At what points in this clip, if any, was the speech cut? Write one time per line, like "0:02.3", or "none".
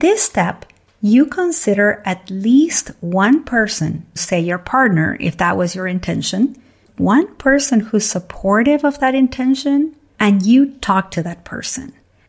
0:04.2